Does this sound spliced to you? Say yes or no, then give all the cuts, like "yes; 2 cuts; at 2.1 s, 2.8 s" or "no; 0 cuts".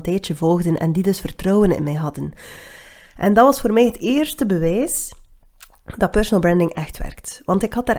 no; 0 cuts